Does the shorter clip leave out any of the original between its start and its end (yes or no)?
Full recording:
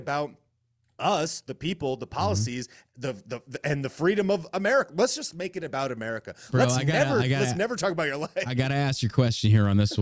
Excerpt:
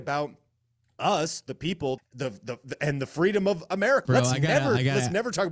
yes